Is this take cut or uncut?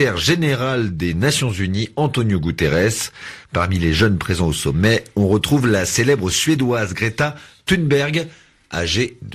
uncut